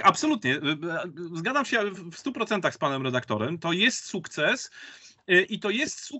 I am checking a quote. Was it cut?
no; 0 cuts

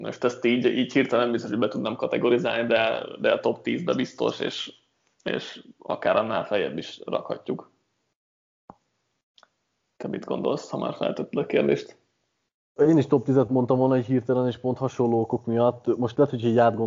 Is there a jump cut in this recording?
no; 0 cuts

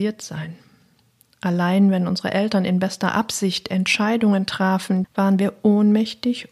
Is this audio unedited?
no; 1 cut; at 5.0 s

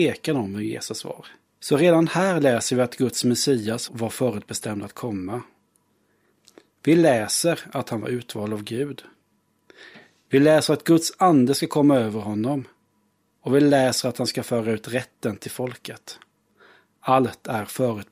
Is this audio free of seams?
no; 2 cuts; at 1.4 s, 3.9 s

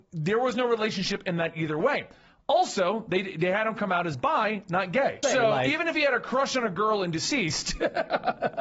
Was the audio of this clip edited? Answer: yes; 1 cut; at 5.2 s

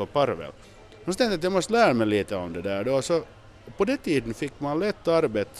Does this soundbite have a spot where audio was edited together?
no; 0 cuts

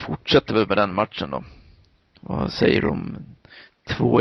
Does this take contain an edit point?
no; 0 cuts

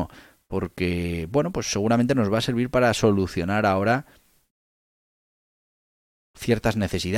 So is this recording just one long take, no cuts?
yes; 0 cuts

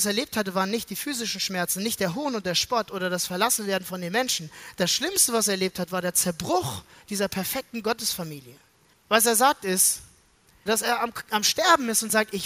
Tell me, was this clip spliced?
yes; 2 cuts; at 8.9 s, 10.7 s

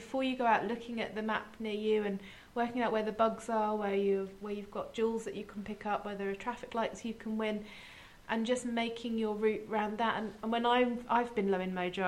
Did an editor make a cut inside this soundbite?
no; 0 cuts

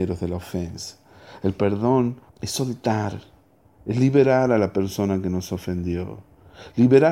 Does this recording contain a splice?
yes; 1 cut; at 2.3 s

